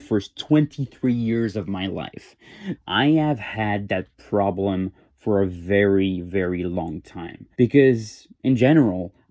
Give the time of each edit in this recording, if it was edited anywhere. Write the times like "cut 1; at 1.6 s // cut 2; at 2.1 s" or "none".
cut 1; at 2.8 s // cut 2; at 7.5 s